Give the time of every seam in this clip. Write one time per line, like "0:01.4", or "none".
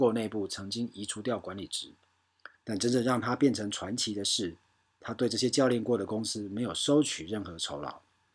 0:02.5